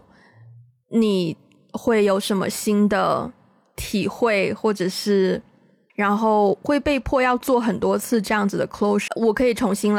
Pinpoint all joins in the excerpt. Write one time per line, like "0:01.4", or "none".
0:05.9
0:09.1